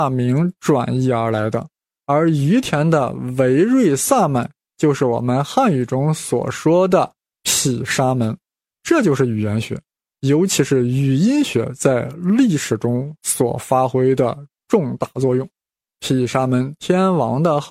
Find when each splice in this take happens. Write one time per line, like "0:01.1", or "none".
0:08.7
0:15.9